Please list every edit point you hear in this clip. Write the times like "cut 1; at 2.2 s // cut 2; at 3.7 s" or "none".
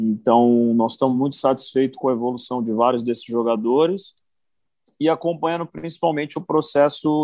none